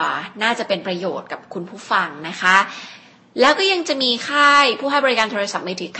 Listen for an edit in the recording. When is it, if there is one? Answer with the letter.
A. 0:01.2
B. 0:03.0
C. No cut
C